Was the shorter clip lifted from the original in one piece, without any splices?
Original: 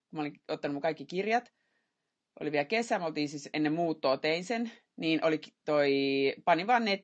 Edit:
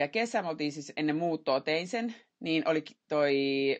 yes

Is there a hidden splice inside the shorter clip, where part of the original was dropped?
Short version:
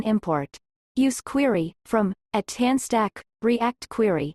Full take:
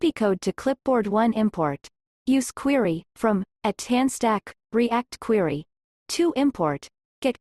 no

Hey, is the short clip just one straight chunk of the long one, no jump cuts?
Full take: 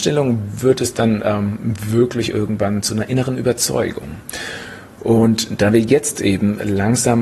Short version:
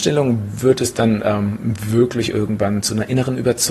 yes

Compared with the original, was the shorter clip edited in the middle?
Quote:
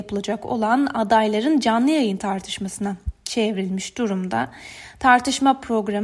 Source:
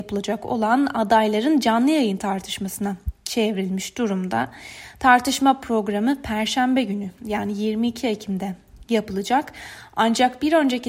no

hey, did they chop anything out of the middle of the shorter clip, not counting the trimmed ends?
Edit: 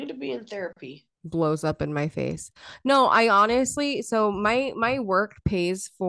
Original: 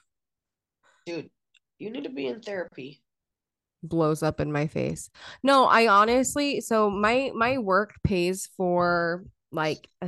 yes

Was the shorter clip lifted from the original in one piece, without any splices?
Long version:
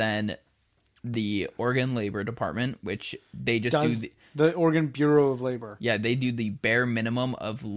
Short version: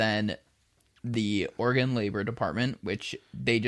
yes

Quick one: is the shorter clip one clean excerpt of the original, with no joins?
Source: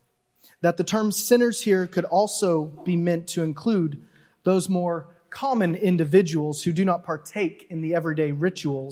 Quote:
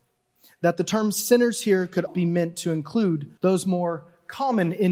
no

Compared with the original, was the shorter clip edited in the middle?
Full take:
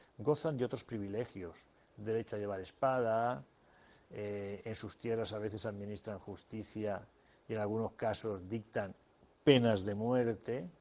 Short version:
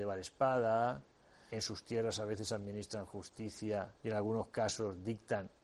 yes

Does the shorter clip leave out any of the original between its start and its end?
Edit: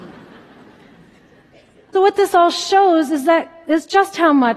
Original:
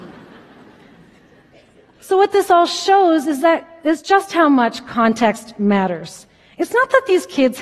yes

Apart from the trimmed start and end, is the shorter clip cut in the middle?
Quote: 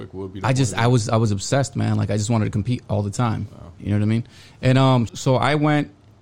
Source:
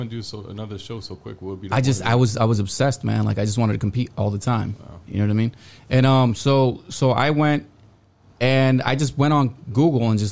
yes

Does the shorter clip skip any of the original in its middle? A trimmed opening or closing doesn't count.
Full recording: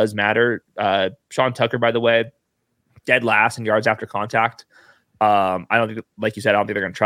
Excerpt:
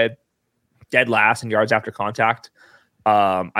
no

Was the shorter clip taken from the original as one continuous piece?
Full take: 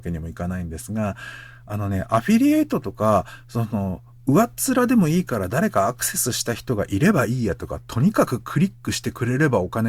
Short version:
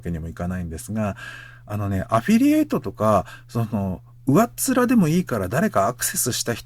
yes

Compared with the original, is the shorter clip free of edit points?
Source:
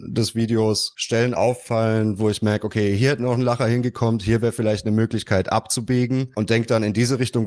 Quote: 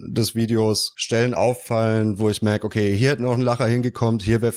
yes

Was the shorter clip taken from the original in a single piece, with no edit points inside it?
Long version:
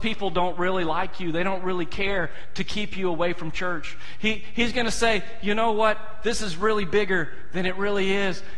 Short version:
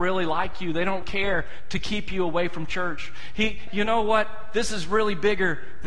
no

